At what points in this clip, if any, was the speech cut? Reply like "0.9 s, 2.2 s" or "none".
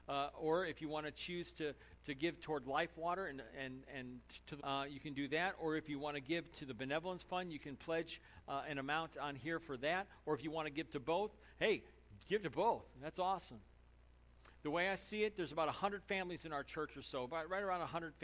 4.6 s